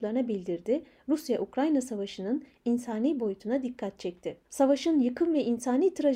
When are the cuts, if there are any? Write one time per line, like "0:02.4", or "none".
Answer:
0:04.4